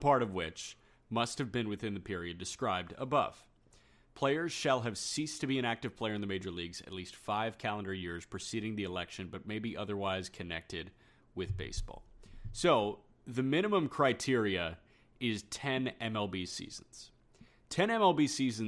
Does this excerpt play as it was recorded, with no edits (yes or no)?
yes